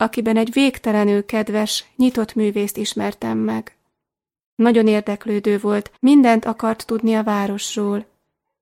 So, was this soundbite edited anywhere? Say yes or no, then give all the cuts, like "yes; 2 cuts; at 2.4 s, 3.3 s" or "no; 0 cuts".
yes; 1 cut; at 6.0 s